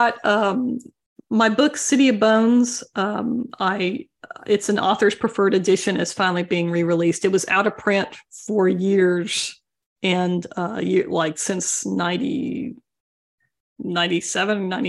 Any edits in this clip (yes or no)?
no